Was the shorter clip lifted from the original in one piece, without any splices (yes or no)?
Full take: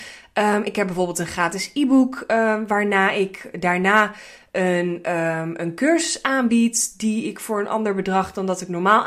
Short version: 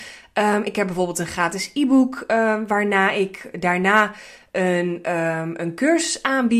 yes